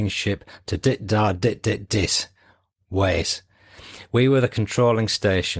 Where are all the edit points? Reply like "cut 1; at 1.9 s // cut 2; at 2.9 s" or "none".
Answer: none